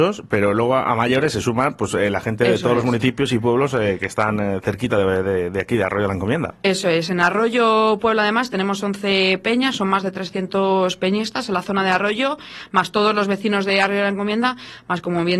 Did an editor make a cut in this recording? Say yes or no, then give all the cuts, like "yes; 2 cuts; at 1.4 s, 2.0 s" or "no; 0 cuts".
no; 0 cuts